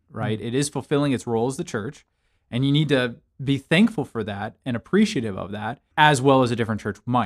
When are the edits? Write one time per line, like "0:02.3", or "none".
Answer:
0:05.9